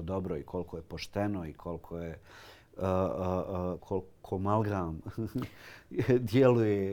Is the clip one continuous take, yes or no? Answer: no